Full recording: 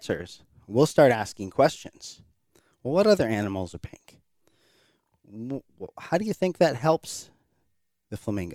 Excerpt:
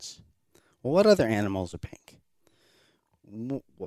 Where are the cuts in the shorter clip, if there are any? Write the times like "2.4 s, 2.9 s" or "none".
none